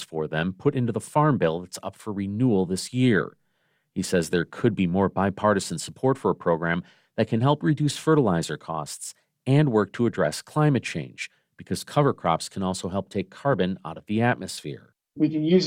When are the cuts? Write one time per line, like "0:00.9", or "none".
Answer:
none